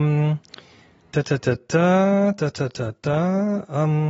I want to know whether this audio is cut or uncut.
uncut